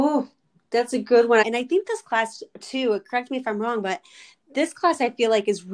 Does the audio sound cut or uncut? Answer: cut